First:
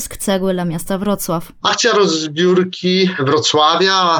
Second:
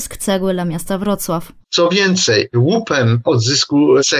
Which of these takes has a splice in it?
second; 1 cut; at 1.6 s

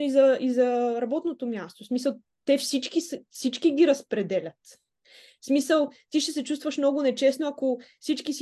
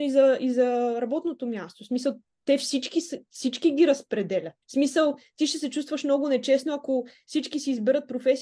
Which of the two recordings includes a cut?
second; 1 cut; at 4.6 s

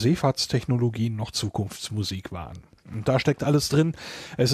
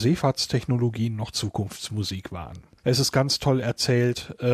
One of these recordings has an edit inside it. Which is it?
second; 1 cut; at 2.8 s

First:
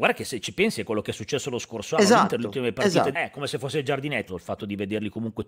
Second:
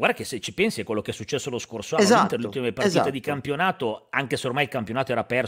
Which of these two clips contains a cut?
first; 2 cuts; at 3.1 s, 4.3 s

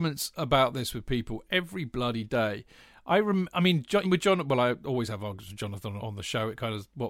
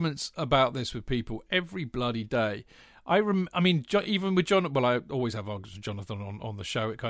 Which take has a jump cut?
first; 2 cuts; at 4.0 s, 6.0 s

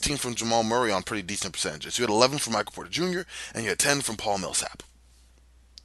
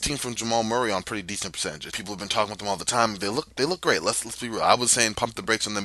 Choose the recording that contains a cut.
second; 1 cut; at 1.9 s

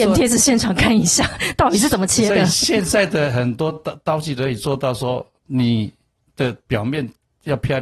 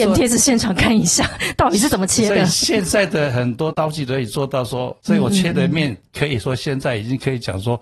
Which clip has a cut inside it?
second; 2 cuts; at 3.7 s, 5.0 s

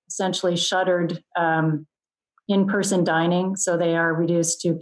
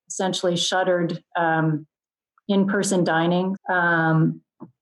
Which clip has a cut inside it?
second; 1 cut; at 3.6 s

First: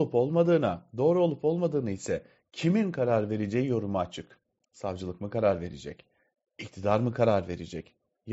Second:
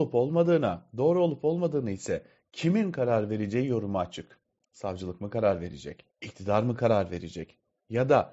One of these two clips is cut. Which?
second; 1 cut; at 6.1 s

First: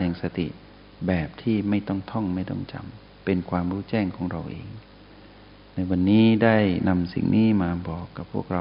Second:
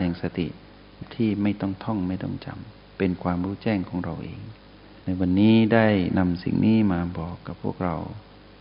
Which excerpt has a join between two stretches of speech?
second; 2 cuts; at 1.0 s, 5.0 s

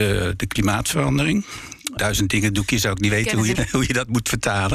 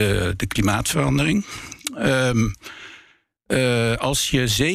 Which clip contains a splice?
first; 2 cuts; at 2.0 s, 3.5 s

